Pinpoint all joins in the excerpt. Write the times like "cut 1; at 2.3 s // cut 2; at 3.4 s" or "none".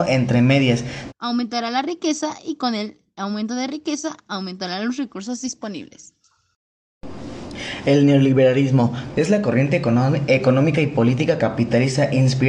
cut 1; at 1.1 s // cut 2; at 9.1 s